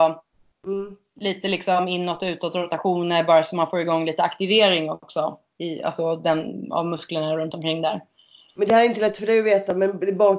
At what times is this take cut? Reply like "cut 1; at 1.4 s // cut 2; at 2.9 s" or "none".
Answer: none